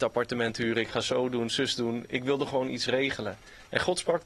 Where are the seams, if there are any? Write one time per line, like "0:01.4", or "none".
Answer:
none